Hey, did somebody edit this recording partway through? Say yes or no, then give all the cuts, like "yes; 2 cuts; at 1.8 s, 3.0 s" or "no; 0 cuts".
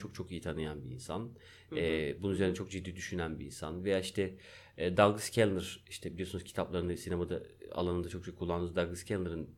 no; 0 cuts